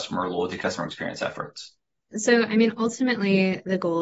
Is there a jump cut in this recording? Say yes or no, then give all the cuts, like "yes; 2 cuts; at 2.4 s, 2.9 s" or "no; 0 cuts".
yes; 1 cut; at 2.1 s